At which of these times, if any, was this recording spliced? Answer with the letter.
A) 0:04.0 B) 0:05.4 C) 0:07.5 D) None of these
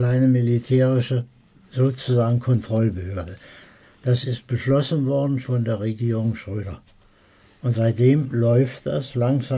B